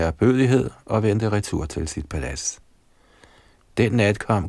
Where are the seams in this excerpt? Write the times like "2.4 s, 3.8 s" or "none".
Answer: none